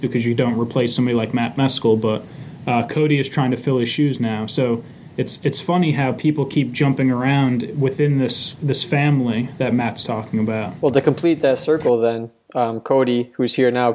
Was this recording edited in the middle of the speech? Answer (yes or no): no